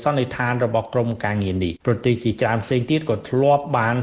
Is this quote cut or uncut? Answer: cut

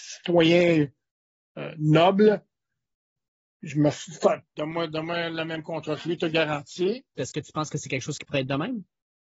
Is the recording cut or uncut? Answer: cut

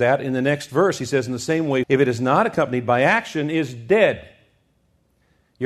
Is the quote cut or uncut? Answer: cut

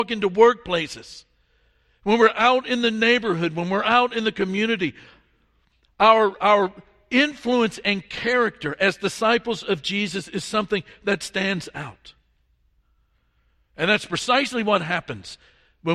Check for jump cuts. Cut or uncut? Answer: uncut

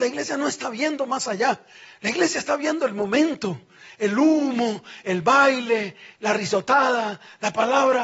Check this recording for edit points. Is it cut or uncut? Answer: uncut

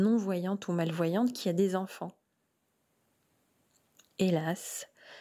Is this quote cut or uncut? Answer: uncut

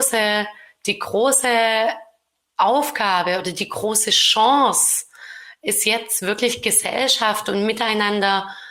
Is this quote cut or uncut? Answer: uncut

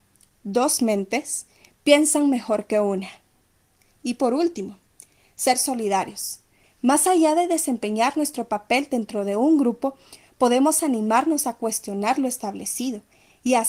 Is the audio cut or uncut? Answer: cut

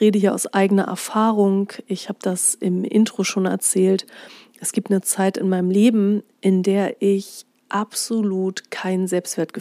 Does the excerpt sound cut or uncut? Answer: uncut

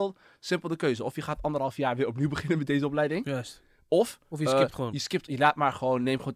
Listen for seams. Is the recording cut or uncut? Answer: uncut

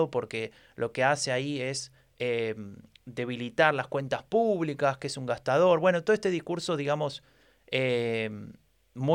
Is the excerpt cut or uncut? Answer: uncut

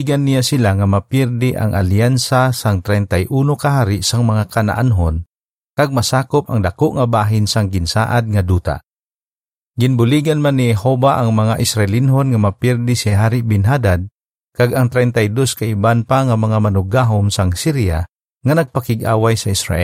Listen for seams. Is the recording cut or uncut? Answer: uncut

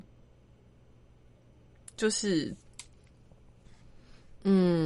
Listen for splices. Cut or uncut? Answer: uncut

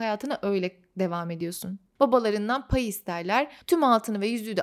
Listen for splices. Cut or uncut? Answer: cut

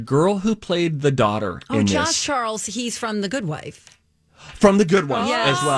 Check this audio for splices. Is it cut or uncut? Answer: uncut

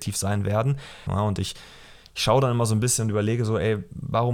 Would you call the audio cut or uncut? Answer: cut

